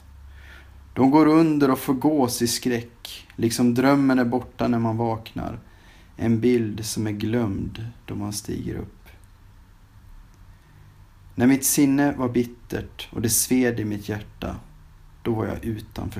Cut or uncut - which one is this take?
uncut